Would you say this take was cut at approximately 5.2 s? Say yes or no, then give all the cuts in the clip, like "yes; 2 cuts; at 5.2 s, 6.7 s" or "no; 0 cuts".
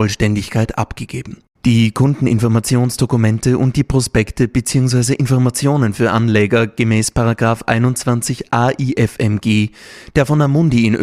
no; 1 cut; at 1.6 s